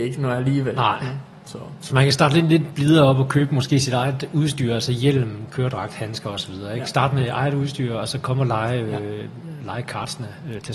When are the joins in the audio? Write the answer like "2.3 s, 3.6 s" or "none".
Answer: none